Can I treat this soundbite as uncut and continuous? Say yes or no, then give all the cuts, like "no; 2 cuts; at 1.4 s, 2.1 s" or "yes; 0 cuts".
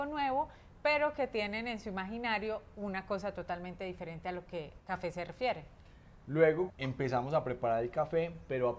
no; 1 cut; at 6.7 s